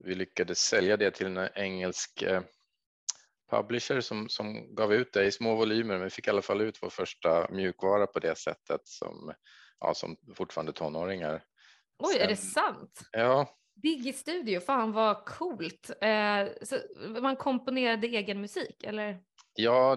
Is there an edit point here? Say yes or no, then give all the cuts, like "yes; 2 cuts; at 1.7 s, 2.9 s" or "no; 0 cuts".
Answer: no; 0 cuts